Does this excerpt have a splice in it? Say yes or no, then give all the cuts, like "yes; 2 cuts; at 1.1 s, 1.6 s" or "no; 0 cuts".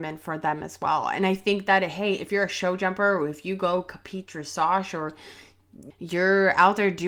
yes; 1 cut; at 5.9 s